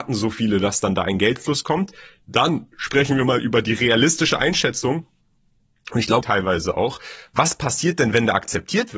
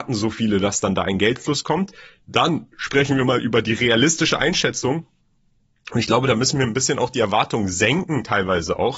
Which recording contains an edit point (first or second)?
first